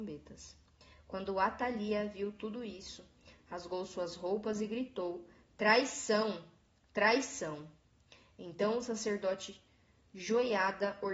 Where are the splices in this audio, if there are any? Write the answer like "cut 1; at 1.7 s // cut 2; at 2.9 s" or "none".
none